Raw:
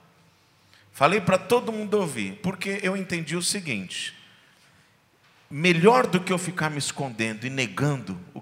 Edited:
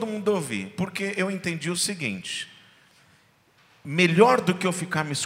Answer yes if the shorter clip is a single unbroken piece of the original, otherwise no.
yes